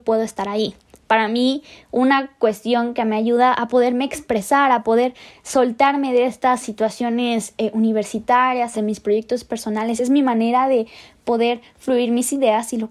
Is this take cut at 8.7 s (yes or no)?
yes